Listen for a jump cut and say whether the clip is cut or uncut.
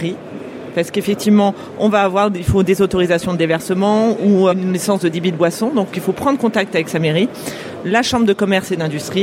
cut